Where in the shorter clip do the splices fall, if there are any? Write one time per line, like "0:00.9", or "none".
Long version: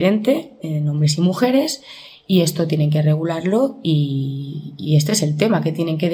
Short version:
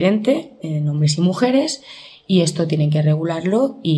none